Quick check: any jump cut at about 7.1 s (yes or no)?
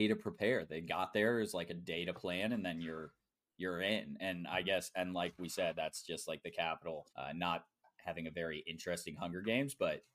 yes